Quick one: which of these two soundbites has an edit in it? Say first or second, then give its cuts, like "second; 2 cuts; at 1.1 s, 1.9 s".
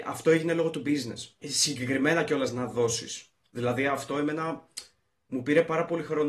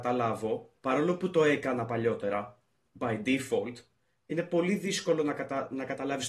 first; 1 cut; at 1.4 s